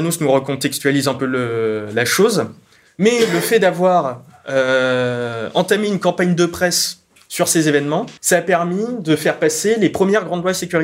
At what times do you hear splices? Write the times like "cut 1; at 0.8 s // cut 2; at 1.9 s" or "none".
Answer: cut 1; at 2.9 s // cut 2; at 8.2 s